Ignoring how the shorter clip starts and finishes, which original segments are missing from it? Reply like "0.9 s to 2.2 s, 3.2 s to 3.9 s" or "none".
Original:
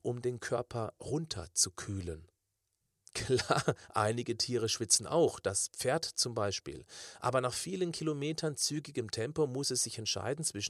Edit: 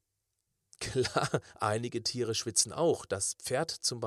none